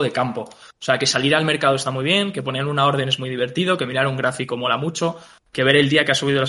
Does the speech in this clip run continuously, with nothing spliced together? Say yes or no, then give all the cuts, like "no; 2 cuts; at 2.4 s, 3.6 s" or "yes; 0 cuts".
yes; 0 cuts